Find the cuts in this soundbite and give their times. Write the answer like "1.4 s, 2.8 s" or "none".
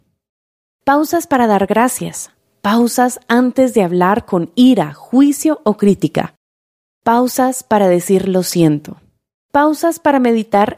none